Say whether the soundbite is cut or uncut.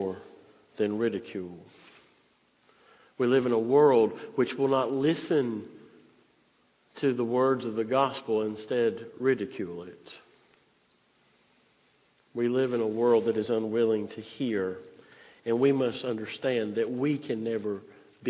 uncut